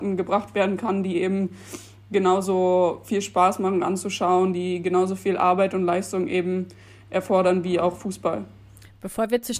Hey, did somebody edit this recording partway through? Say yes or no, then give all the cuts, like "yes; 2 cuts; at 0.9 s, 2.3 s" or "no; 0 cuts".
no; 0 cuts